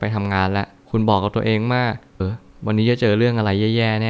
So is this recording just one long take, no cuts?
no; 1 cut; at 2.2 s

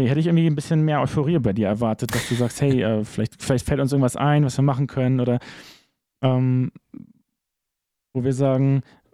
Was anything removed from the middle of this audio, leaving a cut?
no; 0 cuts

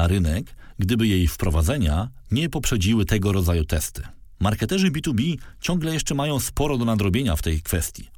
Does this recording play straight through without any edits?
no; 1 cut; at 4.3 s

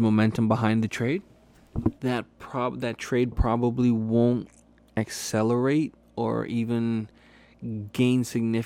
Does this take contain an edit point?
yes; 1 cut; at 2.0 s

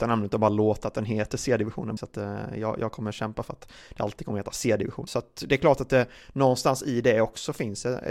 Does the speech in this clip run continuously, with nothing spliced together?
no; 2 cuts; at 2.0 s, 5.1 s

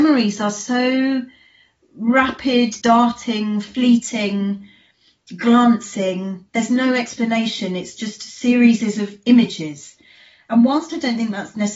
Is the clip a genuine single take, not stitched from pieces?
no; 1 cut; at 2.8 s

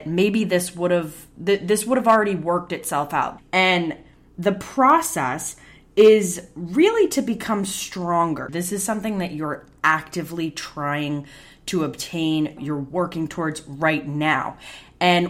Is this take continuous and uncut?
no; 3 cuts; at 3.4 s, 8.5 s, 12.6 s

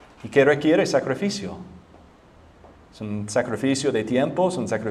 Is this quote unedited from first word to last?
yes; 0 cuts

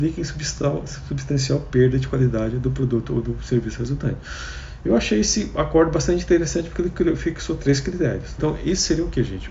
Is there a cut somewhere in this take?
yes; 1 cut; at 8.4 s

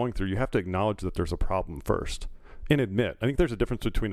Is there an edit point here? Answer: no; 0 cuts

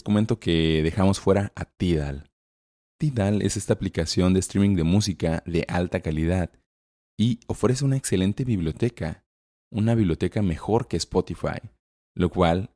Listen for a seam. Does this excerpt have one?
no; 0 cuts

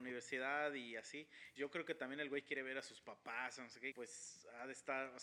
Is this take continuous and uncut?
no; 2 cuts; at 1.6 s, 3.9 s

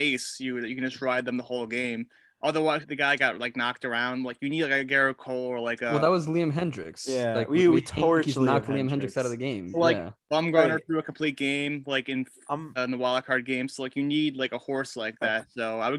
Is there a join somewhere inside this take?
yes; 2 cuts; at 2.8 s, 12.8 s

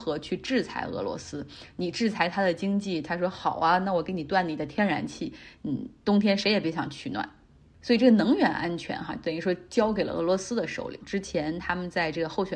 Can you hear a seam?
yes; 1 cut; at 11.0 s

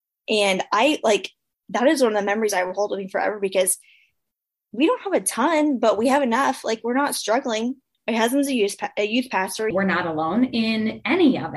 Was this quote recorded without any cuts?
no; 2 cuts; at 7.9 s, 9.7 s

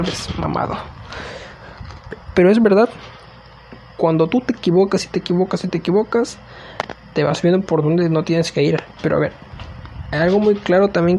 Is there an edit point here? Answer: yes; 1 cut; at 9.0 s

